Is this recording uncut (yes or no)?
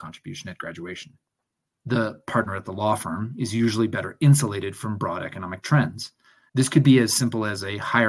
no